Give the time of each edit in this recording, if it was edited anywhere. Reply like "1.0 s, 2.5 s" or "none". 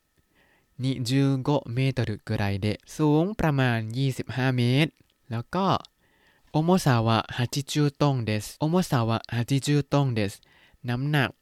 2.9 s, 8.6 s